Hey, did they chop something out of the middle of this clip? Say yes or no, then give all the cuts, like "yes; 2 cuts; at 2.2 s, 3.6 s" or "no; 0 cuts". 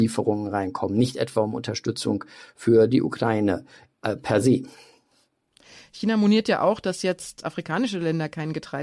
no; 0 cuts